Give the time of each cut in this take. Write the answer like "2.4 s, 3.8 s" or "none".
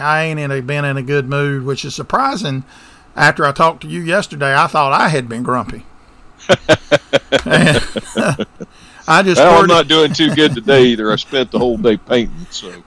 none